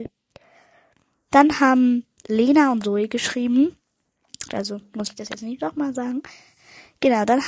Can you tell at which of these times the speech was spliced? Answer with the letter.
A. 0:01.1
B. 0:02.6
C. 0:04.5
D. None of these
C